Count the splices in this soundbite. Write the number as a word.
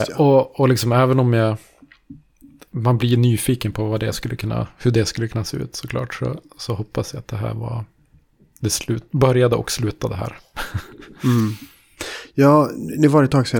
zero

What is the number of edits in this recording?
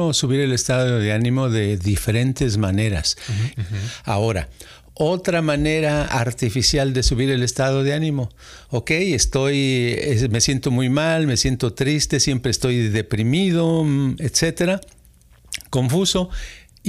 one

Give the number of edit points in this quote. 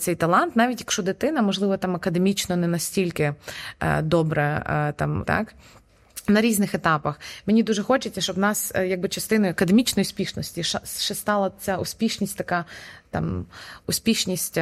one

